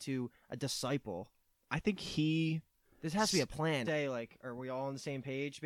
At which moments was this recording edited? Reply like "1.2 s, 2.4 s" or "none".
3.8 s